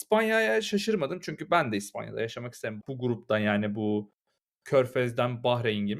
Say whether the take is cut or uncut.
cut